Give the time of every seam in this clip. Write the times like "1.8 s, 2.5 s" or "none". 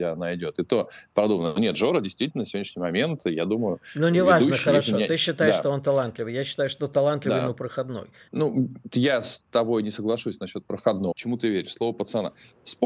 8.3 s, 11.1 s